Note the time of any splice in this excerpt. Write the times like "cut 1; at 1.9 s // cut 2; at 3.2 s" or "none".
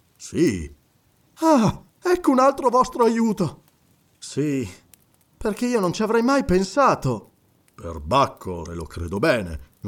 cut 1; at 1.9 s // cut 2; at 8.7 s

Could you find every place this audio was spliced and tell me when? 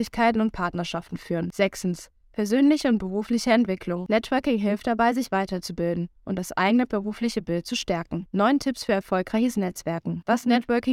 cut 1; at 8.3 s

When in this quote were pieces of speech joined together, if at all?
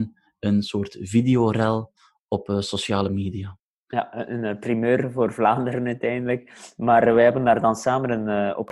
none

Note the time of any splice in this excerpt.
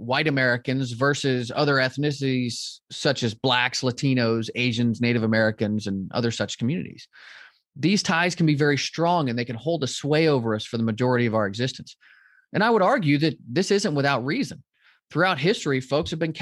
none

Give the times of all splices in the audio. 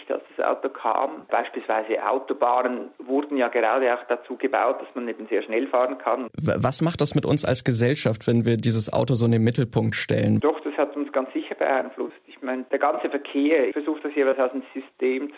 cut 1; at 6.3 s // cut 2; at 10.4 s // cut 3; at 13.7 s

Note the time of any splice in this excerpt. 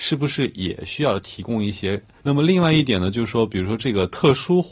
cut 1; at 2.2 s

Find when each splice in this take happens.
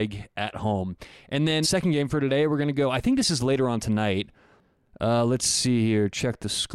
cut 1; at 1.6 s

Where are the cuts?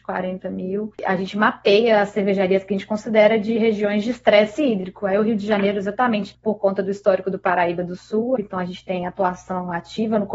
cut 1; at 1.0 s // cut 2; at 8.4 s

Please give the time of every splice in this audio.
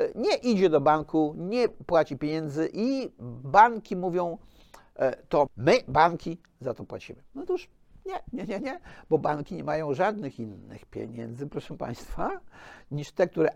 cut 1; at 5.5 s

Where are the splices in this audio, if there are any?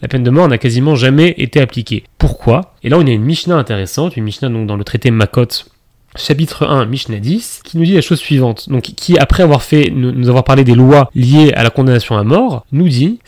none

